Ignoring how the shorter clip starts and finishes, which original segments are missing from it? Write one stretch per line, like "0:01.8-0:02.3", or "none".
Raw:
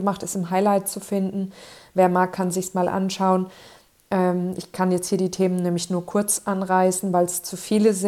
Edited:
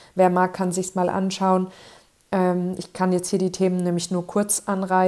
none